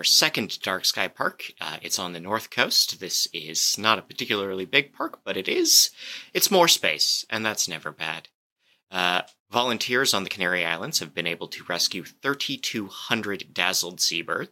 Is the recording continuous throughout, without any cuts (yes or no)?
yes